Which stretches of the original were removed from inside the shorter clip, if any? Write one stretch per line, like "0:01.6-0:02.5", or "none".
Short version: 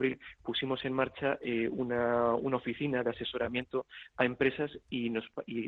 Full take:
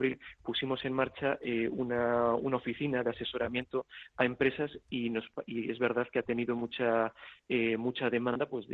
none

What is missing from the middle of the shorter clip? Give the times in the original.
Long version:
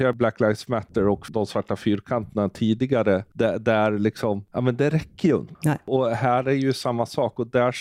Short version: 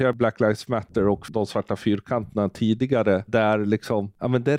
0:03.3-0:03.6

